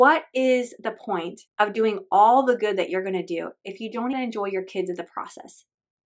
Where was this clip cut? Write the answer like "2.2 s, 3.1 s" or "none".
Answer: 1.5 s, 4.1 s